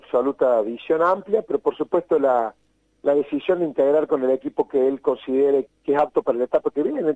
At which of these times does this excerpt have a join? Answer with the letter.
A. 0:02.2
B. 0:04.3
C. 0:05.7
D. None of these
C